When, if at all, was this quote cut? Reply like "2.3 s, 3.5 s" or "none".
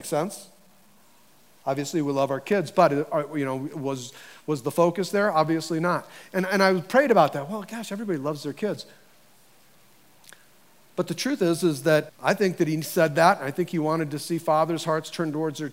12.1 s